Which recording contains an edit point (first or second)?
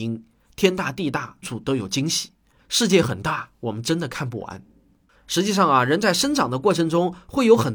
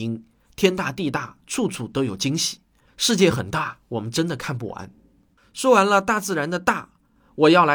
first